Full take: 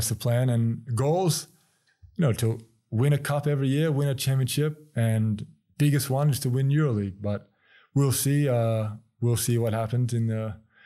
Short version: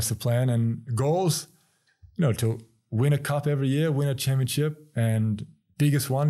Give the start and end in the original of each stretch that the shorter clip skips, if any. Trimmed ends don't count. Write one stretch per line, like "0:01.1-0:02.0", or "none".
none